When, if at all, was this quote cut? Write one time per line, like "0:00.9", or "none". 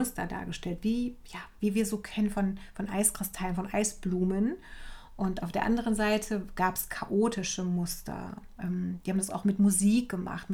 none